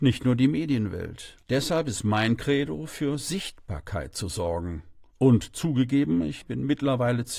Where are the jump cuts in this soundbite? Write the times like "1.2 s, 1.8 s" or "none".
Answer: 1.4 s